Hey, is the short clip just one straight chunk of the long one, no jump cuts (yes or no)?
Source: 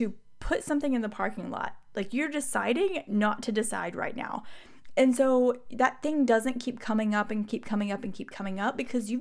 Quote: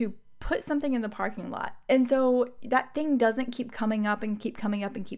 no